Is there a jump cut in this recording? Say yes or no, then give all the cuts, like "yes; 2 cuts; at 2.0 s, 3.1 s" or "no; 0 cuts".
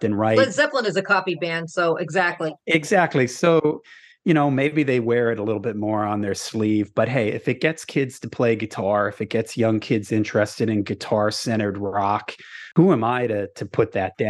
no; 0 cuts